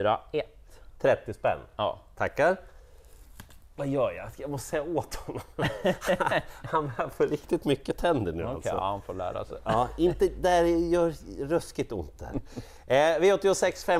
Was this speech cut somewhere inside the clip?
no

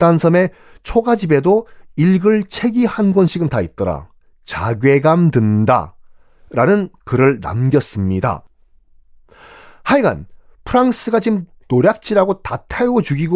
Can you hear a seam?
no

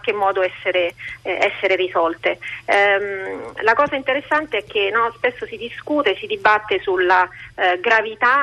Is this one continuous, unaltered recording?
yes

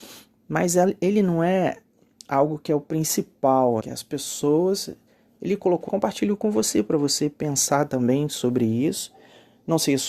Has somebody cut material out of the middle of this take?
yes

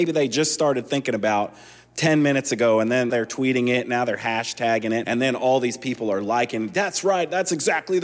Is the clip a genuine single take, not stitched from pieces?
no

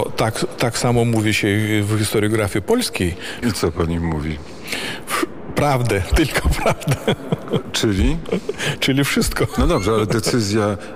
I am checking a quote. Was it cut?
yes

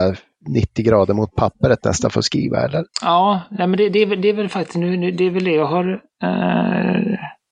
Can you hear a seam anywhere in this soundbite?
yes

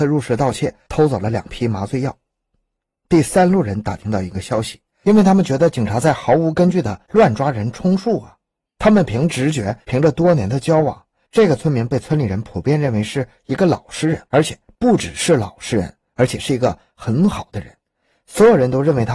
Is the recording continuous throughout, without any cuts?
no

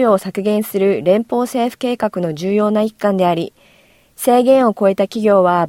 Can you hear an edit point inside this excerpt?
no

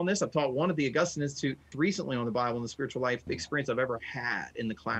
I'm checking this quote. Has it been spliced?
yes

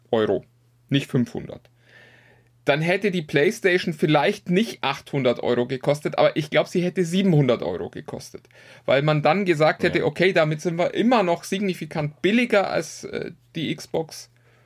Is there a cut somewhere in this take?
no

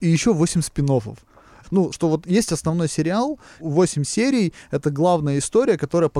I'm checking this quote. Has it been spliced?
yes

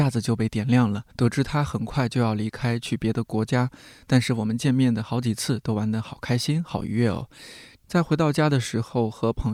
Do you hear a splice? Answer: yes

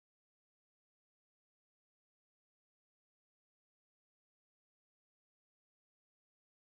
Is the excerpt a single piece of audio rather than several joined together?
yes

